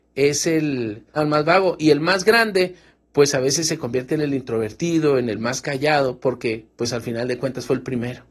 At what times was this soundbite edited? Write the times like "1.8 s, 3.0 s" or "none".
1.2 s

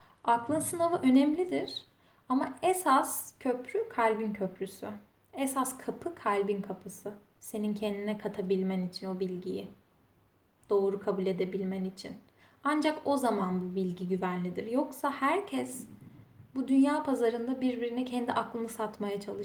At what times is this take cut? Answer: 7.4 s

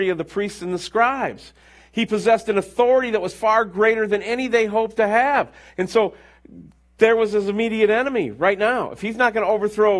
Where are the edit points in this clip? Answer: none

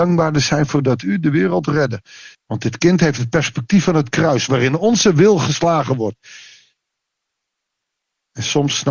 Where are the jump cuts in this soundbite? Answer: 2.3 s

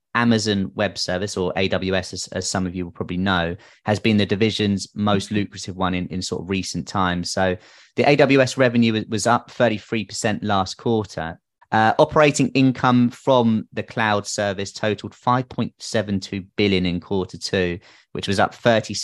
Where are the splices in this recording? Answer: 11.6 s

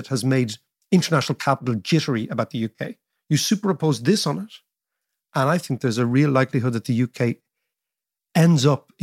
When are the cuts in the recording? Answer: 3.2 s

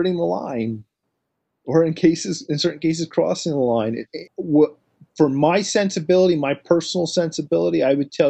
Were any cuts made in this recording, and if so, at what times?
4.3 s

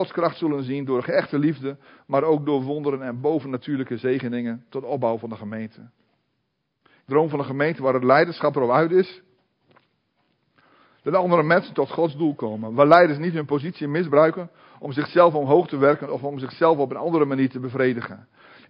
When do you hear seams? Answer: none

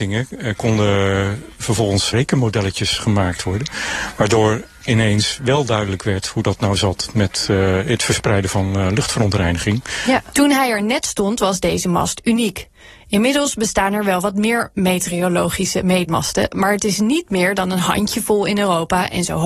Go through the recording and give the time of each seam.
10.3 s

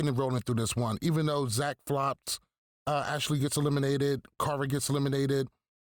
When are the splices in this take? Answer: none

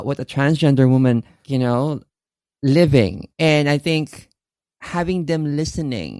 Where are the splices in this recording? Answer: 1.4 s, 3.3 s

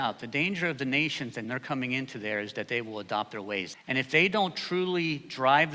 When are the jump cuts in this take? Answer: 3.7 s

